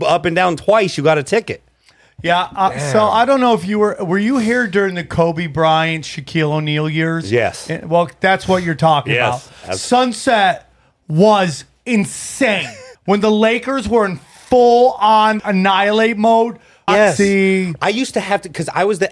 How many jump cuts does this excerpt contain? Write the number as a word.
three